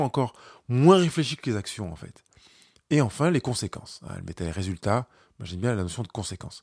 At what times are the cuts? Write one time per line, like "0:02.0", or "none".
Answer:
none

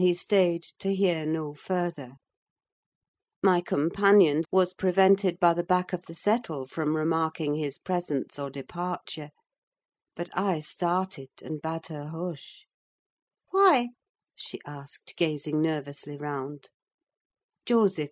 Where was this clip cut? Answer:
0:04.4

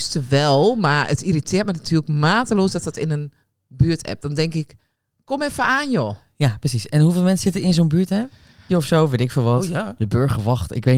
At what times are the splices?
0:08.7

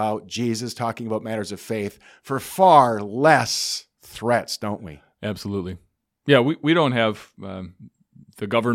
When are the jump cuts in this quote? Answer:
none

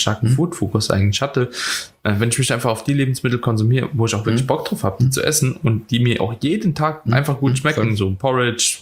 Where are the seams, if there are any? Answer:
none

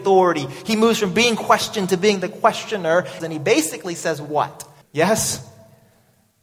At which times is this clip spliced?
0:03.2
0:04.8

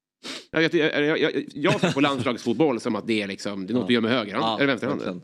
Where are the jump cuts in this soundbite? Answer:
none

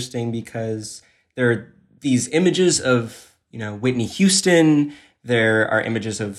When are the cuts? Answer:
none

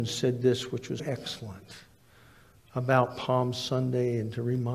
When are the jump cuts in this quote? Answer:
0:01.0

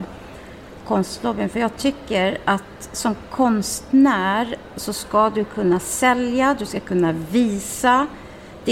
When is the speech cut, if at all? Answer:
none

